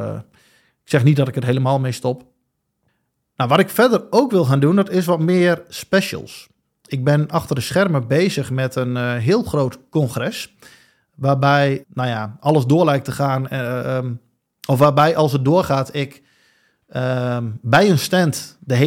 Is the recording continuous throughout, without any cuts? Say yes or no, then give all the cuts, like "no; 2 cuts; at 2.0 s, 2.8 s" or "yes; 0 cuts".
no; 1 cut; at 11.8 s